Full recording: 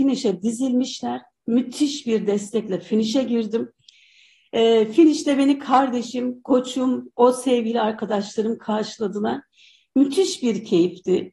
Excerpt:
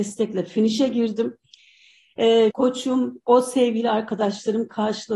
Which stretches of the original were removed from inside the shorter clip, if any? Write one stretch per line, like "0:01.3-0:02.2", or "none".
0:04.9-0:06.4

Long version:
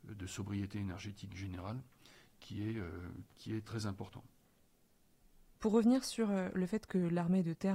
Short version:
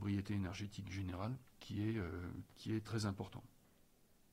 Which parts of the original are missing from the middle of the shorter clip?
0:01.9-0:02.3

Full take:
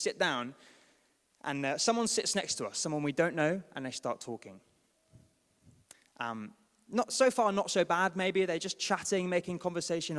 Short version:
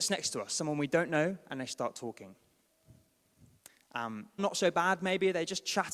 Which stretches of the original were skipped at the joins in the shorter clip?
0:06.6-0:07.5

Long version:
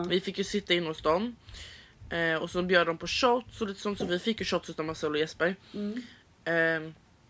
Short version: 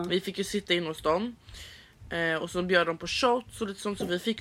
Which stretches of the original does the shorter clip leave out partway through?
none

